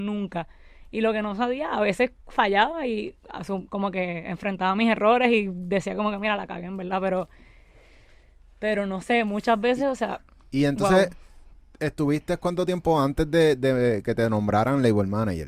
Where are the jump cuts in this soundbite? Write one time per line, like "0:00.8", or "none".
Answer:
none